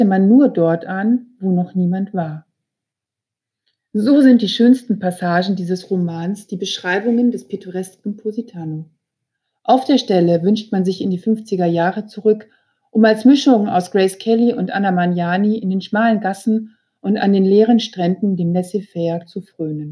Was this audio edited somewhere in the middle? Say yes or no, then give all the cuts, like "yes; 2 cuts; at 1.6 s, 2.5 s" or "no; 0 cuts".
no; 0 cuts